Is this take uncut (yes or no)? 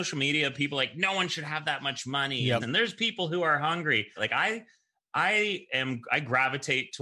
no